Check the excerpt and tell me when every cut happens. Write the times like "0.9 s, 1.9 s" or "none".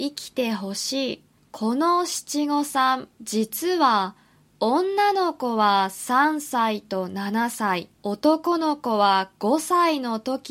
1.4 s, 3.1 s, 8.0 s